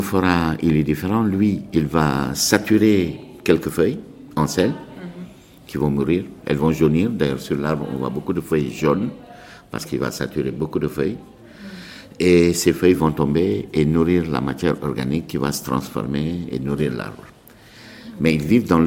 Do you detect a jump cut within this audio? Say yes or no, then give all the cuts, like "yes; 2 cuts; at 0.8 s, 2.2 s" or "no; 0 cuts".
no; 0 cuts